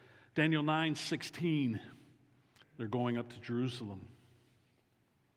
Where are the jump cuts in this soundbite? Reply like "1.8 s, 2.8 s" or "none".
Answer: 2.6 s